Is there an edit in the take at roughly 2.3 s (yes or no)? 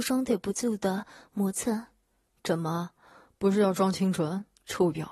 no